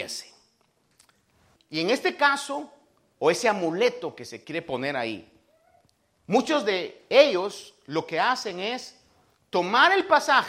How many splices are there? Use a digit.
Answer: 2